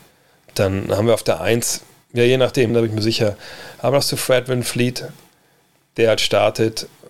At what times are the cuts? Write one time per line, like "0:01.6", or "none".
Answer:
0:02.7